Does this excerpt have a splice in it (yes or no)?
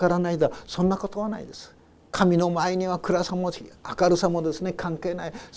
no